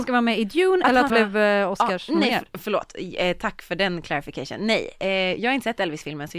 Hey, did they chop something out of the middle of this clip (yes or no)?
yes